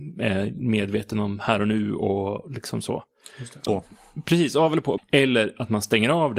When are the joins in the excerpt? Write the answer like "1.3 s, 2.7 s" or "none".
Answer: 3.7 s, 5.0 s